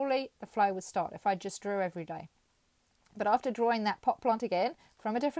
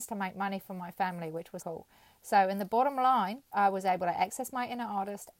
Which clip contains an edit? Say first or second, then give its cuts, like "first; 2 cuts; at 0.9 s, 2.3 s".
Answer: second; 2 cuts; at 1.6 s, 3.5 s